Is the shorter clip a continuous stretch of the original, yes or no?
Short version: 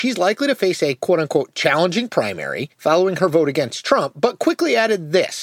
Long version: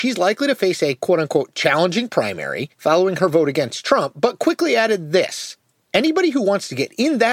yes